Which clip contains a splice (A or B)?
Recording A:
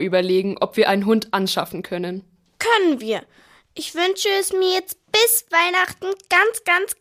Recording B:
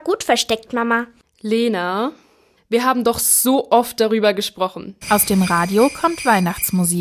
B